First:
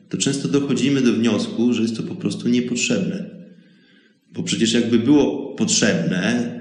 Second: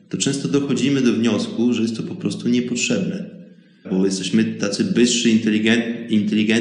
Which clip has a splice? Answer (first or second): second